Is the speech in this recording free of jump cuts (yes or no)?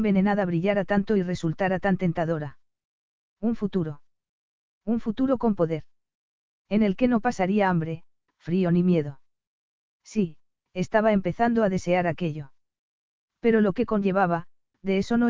yes